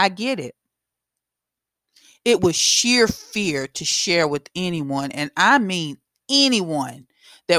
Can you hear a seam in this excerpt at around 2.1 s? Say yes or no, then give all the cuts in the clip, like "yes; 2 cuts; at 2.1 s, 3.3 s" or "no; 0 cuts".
no; 0 cuts